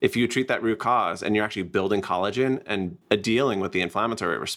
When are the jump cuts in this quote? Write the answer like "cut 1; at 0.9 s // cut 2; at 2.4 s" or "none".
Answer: cut 1; at 3.0 s

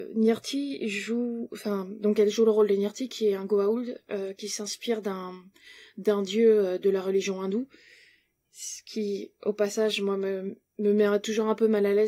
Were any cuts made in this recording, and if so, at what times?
none

